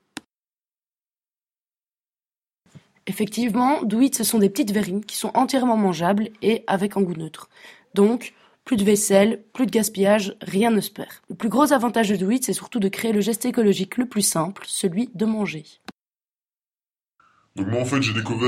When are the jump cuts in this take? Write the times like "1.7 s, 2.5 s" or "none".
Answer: 2.9 s, 11.2 s